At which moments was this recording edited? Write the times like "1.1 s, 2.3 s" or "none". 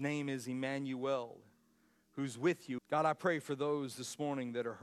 2.8 s